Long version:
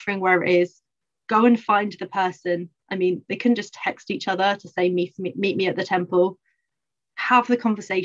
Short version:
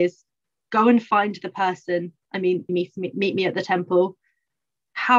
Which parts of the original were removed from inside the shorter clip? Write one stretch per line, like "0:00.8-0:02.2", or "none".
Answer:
0:03.3-0:04.9